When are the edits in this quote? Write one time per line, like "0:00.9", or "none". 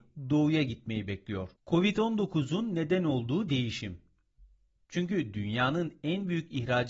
0:01.6
0:04.8